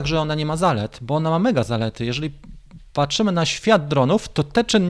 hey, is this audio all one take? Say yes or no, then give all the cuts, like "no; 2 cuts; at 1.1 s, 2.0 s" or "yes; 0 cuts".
yes; 0 cuts